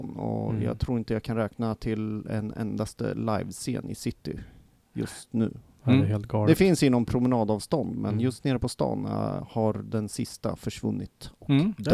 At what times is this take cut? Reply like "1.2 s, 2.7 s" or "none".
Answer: none